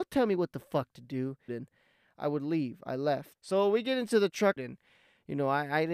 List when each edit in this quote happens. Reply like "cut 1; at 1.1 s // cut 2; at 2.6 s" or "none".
cut 1; at 1.5 s // cut 2; at 3.4 s // cut 3; at 4.6 s